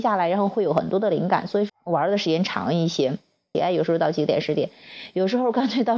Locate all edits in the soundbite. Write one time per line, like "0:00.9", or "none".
0:01.7
0:03.5